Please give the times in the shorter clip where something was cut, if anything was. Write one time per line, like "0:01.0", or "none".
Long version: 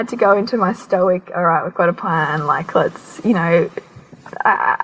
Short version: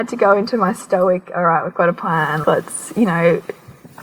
0:02.4